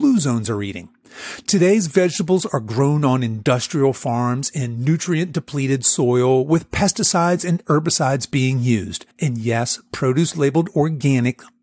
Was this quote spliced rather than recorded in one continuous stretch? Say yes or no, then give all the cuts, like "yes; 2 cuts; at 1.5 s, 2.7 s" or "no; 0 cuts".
yes; 1 cut; at 9.1 s